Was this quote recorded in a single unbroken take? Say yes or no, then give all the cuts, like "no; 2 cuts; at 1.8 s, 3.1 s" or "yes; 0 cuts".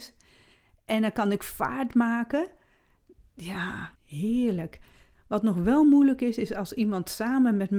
no; 1 cut; at 4.0 s